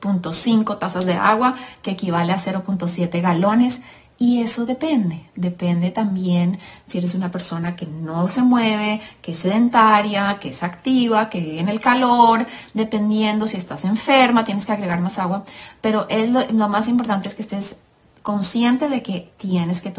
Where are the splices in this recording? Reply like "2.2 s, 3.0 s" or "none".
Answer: none

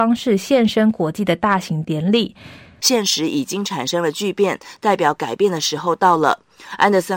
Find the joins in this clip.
2.8 s

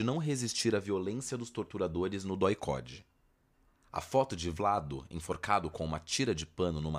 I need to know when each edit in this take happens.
none

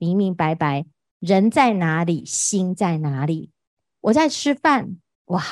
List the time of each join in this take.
none

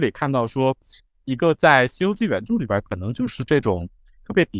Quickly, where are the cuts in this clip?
none

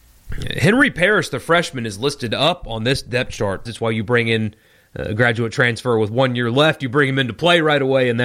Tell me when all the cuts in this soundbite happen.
3.7 s

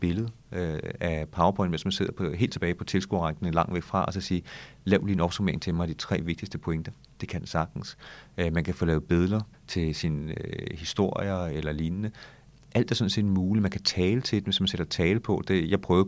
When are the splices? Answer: none

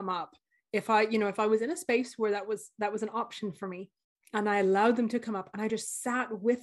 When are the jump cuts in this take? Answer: none

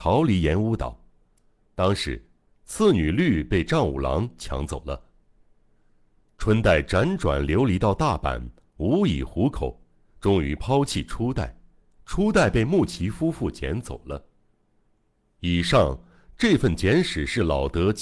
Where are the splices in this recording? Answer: none

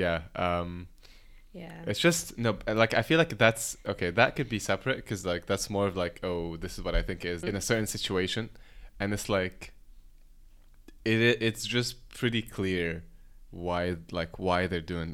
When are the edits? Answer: 7.4 s

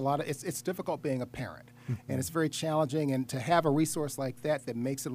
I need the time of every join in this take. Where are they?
none

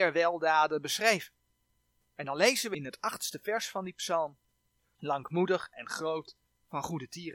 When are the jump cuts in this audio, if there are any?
4.9 s

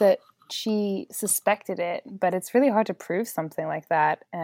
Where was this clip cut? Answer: none

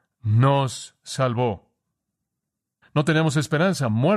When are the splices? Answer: 2.8 s

